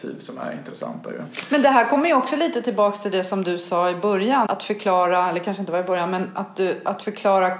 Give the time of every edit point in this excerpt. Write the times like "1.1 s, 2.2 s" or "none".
4.5 s